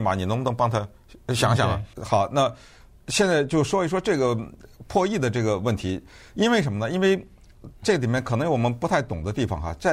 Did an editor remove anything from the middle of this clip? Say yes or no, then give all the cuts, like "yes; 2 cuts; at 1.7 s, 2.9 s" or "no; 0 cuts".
yes; 1 cut; at 1.9 s